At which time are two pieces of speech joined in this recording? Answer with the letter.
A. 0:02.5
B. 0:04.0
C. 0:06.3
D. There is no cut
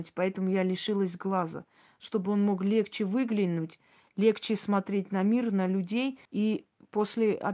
C